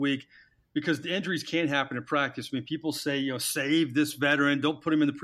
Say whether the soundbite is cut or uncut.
uncut